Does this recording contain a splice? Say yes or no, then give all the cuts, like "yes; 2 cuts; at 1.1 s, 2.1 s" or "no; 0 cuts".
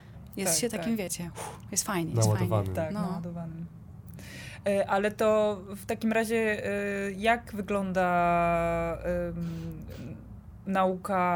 no; 0 cuts